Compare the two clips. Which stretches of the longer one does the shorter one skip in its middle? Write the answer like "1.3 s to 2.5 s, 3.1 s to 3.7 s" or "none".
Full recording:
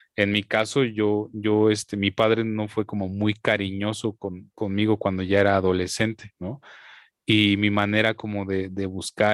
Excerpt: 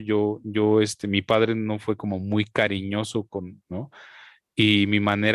4.5 s to 6.3 s